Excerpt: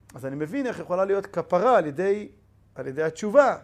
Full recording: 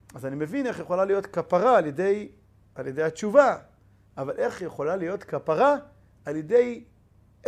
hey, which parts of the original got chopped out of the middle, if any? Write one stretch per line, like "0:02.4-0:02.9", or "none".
none